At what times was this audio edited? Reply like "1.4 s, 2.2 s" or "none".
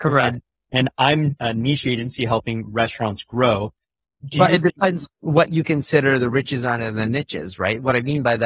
1.4 s